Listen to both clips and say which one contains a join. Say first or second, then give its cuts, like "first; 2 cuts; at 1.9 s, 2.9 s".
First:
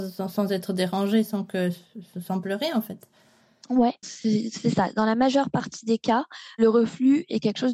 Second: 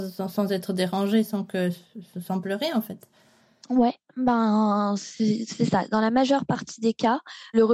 first; 1 cut; at 4.0 s